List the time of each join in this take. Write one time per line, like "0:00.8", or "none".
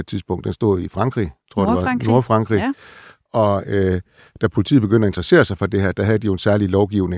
none

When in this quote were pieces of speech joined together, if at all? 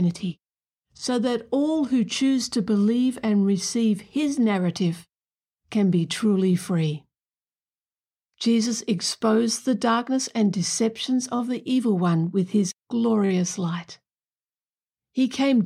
0:08.3

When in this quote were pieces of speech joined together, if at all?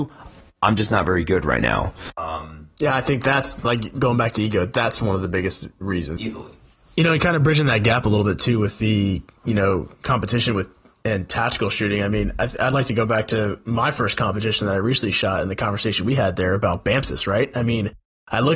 0:06.2

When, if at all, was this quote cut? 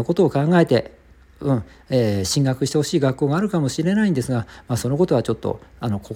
none

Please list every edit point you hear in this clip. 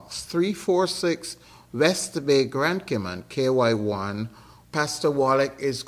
0:04.6

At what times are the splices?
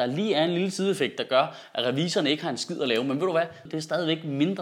0:03.7

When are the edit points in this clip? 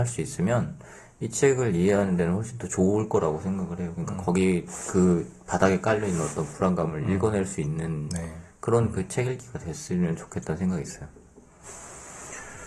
none

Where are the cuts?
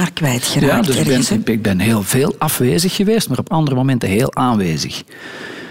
none

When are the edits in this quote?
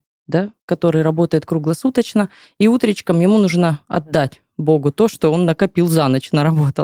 none

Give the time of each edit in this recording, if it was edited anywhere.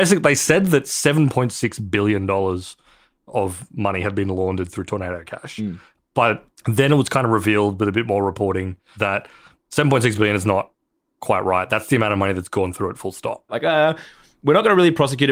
0:13.5

